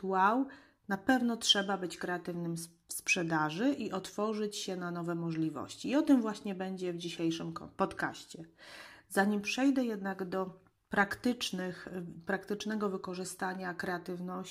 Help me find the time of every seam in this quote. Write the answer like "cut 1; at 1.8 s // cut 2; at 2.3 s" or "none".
none